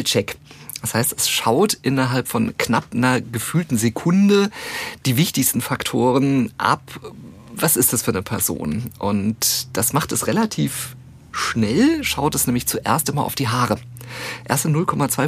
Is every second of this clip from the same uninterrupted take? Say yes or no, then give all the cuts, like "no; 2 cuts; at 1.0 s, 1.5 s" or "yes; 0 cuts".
yes; 0 cuts